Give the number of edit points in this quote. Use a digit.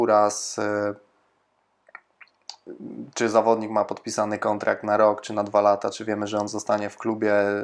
0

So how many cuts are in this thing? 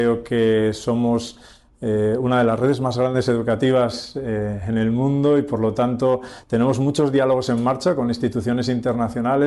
0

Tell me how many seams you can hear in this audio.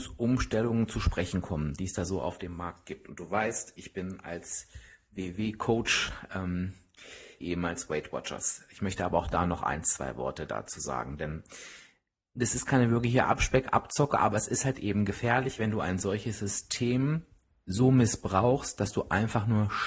1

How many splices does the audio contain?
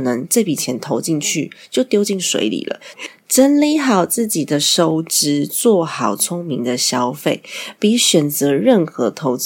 1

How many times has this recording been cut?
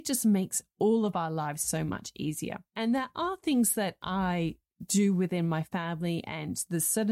1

